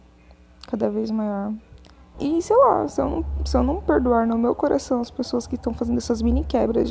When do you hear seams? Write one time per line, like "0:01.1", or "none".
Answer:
0:02.1